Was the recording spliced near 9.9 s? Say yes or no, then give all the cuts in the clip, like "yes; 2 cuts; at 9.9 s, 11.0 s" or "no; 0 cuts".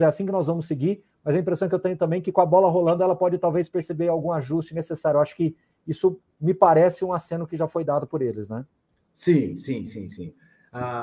yes; 1 cut; at 9.9 s